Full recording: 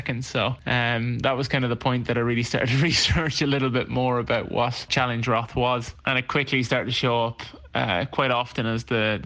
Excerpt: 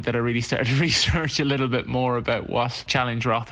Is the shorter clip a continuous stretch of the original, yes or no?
yes